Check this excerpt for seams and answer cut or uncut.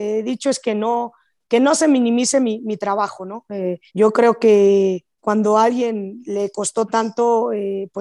cut